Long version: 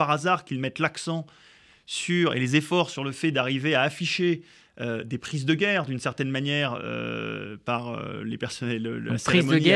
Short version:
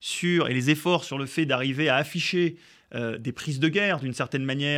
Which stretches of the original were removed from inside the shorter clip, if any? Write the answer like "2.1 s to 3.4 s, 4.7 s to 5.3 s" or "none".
none